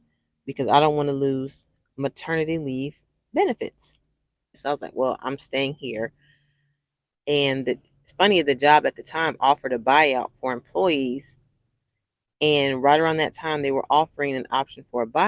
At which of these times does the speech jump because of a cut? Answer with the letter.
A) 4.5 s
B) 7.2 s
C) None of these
A